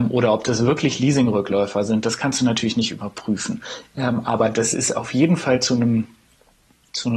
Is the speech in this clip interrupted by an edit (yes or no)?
no